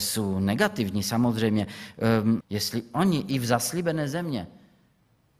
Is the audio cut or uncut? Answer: cut